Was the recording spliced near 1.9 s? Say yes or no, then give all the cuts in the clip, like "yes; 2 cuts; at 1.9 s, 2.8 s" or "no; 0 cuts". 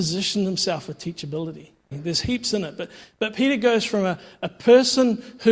yes; 1 cut; at 1.9 s